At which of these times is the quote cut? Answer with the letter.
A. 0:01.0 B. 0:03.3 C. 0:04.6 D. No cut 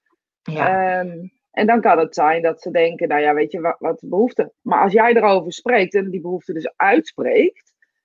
D